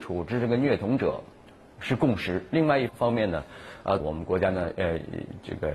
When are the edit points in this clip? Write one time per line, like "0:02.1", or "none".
0:02.9
0:04.0